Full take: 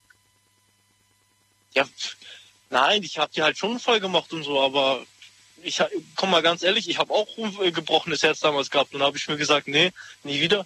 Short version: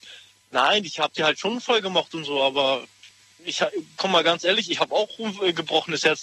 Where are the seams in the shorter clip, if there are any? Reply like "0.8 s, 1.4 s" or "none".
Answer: none

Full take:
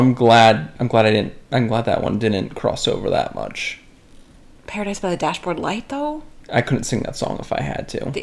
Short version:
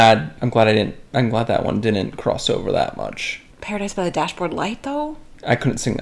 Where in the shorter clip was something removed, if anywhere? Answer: 3.5 s

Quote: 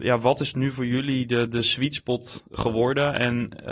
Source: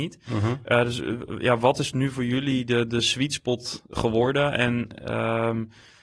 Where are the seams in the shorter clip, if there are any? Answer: none

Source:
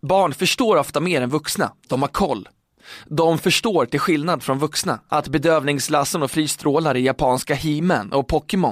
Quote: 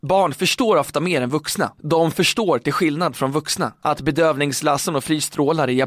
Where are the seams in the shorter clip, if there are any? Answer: 1.8 s

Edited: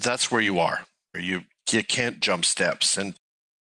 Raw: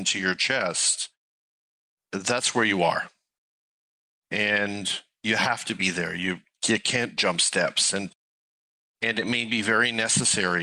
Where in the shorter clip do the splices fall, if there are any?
1.1 s

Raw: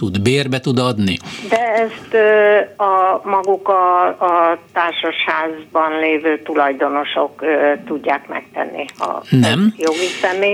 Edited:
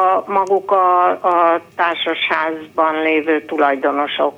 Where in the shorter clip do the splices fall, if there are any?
none

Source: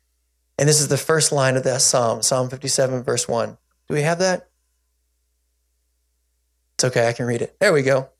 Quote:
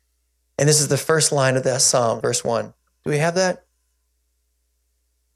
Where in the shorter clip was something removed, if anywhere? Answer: 2.2 s

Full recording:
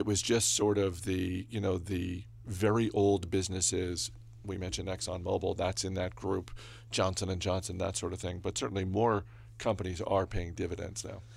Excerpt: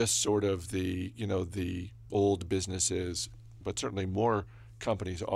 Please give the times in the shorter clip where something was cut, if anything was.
2.1 s, 3.6 s

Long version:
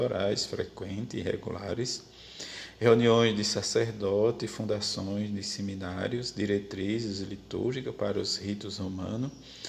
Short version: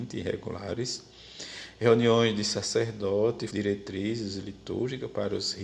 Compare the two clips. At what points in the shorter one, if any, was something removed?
3.5 s

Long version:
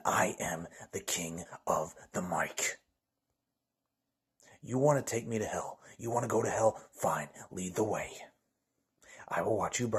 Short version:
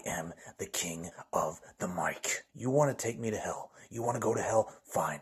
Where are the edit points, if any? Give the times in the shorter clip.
2.5 s

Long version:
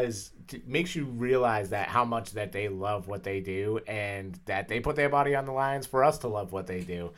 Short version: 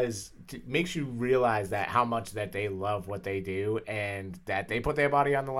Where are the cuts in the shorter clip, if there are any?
none

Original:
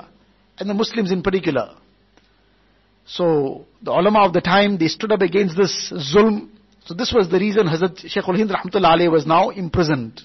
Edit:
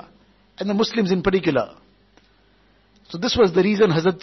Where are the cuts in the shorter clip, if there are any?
2.9 s

